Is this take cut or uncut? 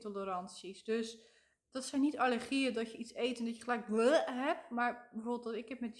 uncut